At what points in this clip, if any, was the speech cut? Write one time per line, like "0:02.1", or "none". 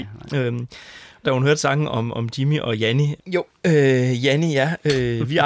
0:01.2
0:03.2